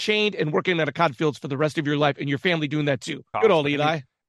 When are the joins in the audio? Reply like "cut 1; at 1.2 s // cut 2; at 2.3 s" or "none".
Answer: cut 1; at 3.3 s